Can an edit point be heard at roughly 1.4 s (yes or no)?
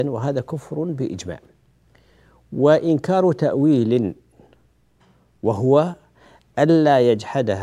no